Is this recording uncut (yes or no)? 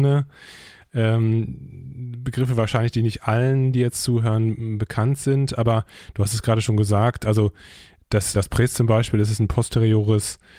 no